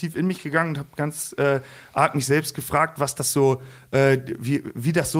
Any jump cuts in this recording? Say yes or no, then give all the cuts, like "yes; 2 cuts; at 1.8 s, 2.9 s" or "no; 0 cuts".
no; 0 cuts